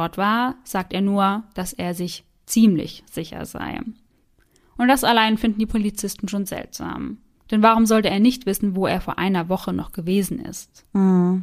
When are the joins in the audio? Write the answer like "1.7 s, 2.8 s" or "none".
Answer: none

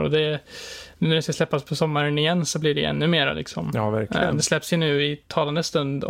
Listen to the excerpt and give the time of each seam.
none

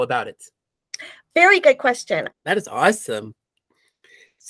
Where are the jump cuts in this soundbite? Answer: 2.3 s

